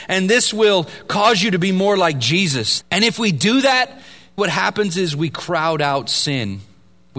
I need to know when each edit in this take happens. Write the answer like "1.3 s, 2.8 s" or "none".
2.8 s, 4.4 s